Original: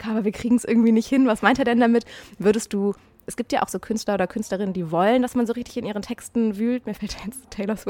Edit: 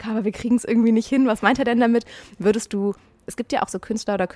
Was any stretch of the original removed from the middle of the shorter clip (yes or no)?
no